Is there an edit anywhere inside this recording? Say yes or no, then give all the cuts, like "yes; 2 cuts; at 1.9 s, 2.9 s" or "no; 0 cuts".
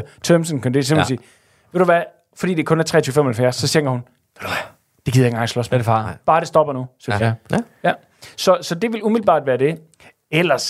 yes; 1 cut; at 7.2 s